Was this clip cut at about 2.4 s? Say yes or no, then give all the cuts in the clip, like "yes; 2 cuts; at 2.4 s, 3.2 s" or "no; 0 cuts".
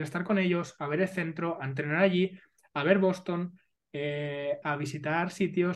no; 1 cut; at 4.6 s